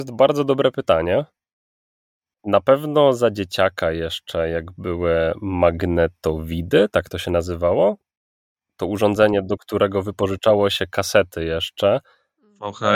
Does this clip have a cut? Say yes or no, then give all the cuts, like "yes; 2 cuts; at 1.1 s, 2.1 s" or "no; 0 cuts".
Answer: yes; 1 cut; at 2.3 s